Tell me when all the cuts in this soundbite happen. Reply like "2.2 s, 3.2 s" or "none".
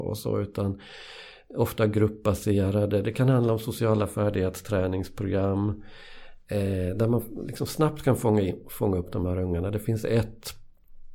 none